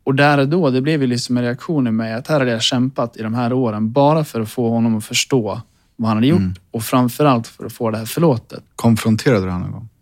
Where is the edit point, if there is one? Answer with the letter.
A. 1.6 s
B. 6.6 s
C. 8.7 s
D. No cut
C